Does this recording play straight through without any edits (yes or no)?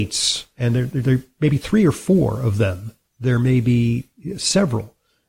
no